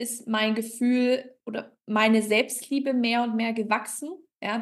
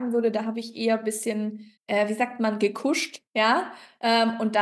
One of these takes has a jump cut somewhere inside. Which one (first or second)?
second